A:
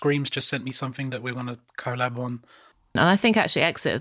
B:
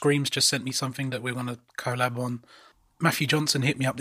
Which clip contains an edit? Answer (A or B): A